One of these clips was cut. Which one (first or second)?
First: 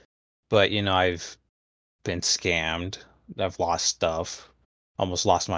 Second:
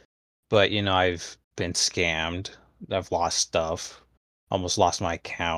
second